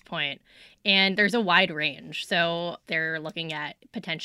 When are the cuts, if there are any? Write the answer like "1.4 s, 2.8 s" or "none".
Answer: 2.8 s